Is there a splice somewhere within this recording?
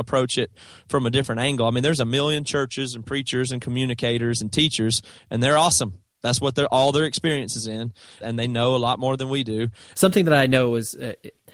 yes; 2 cuts; at 8.2 s, 9.9 s

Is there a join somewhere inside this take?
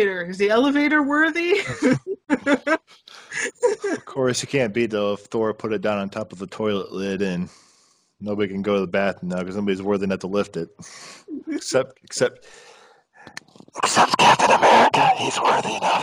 no; 0 cuts

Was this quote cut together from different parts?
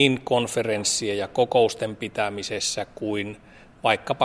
no; 0 cuts

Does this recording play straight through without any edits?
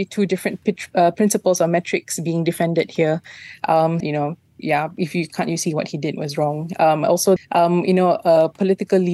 no; 2 cuts; at 4.0 s, 7.4 s

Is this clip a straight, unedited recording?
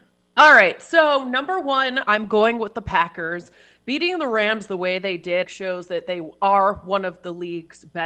no; 1 cut; at 5.4 s

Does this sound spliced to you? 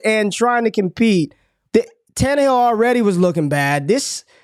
yes; 1 cut; at 1.7 s

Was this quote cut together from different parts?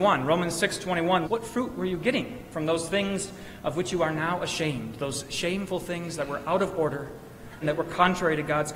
yes; 2 cuts; at 1.2 s, 7.6 s

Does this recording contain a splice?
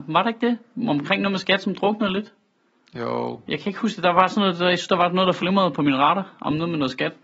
no; 0 cuts

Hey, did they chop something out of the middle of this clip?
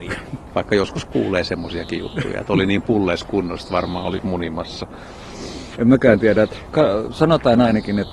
yes; 2 cuts; at 4.2 s, 5.7 s

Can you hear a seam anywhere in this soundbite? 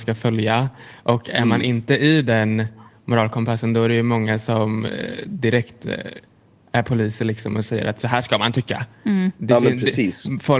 no; 0 cuts

